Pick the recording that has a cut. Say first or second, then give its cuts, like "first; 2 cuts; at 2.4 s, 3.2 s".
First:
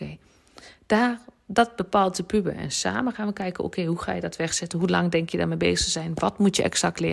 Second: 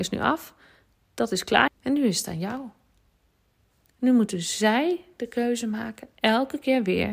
second; 1 cut; at 1.7 s